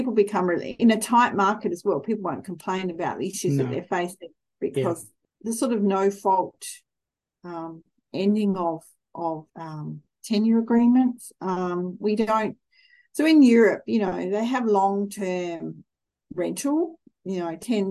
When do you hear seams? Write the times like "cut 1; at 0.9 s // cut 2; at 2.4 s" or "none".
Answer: cut 1; at 5.2 s // cut 2; at 9.5 s